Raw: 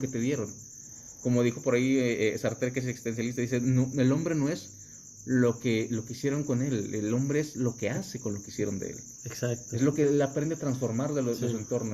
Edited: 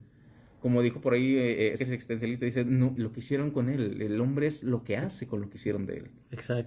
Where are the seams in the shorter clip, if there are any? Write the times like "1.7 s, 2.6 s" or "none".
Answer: 1.8 s, 3.0 s